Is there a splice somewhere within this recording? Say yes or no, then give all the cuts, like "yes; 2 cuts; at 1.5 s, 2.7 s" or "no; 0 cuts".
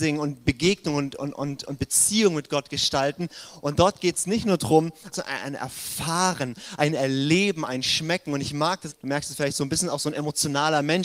yes; 2 cuts; at 5.1 s, 8.9 s